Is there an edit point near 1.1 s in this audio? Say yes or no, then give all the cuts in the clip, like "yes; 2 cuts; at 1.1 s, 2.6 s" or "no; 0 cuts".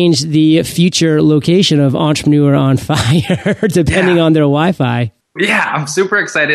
no; 1 cut; at 5.4 s